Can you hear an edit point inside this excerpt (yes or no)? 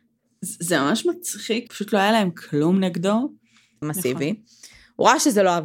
yes